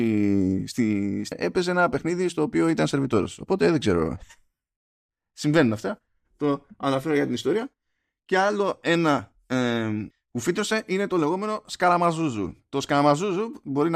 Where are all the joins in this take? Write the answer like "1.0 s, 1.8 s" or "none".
1.3 s, 10.1 s